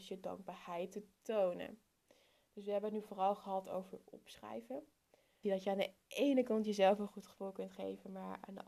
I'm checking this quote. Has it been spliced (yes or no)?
yes